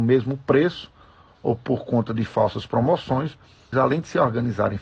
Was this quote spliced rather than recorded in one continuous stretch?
yes; 1 cut; at 3.7 s

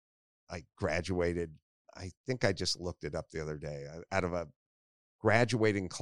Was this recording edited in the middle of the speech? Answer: no; 0 cuts

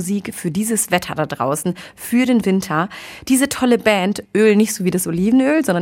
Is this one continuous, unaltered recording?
no; 1 cut; at 4.3 s

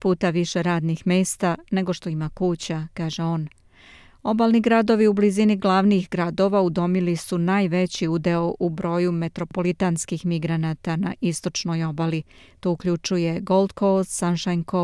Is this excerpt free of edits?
yes; 0 cuts

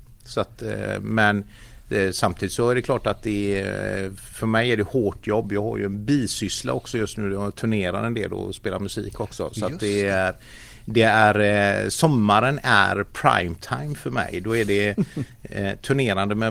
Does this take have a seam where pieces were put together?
no; 0 cuts

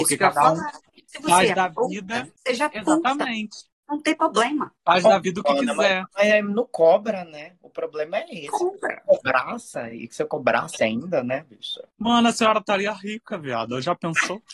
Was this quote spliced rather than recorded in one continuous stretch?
no; 0 cuts

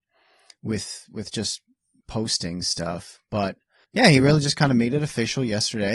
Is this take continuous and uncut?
yes; 0 cuts

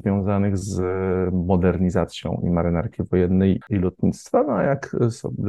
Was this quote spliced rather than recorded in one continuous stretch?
yes; 1 cut; at 3.6 s

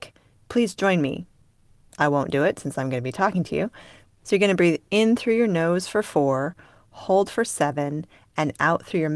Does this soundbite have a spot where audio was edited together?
yes; 1 cut; at 1.9 s

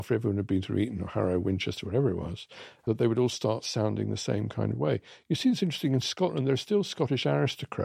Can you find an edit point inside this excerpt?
no; 0 cuts

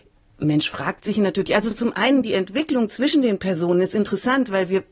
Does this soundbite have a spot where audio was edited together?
no; 0 cuts

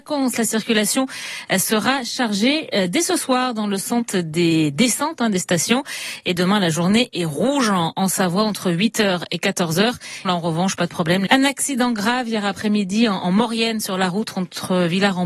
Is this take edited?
yes; 2 cuts; at 10.2 s, 11.3 s

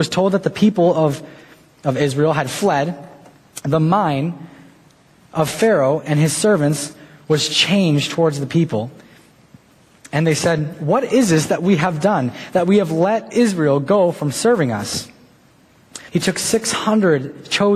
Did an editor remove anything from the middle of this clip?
yes; 1 cut; at 16.1 s

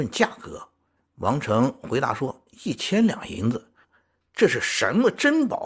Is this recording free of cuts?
no; 1 cut; at 3.8 s

